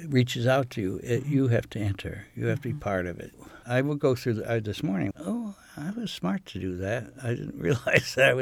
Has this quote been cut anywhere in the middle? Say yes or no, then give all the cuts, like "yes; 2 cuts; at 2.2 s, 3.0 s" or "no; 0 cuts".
yes; 2 cuts; at 3.6 s, 5.1 s